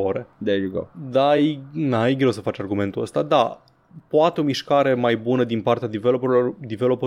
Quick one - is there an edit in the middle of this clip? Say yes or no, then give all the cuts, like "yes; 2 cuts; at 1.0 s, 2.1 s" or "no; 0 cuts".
no; 0 cuts